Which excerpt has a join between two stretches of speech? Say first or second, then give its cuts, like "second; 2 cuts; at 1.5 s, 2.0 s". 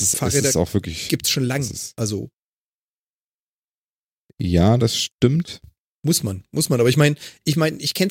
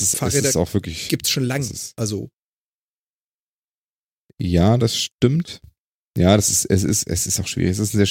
first; 1 cut; at 5.9 s